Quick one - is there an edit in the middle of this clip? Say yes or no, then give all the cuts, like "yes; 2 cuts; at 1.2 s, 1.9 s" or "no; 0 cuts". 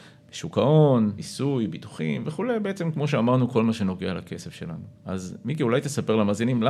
yes; 2 cuts; at 1.2 s, 5.0 s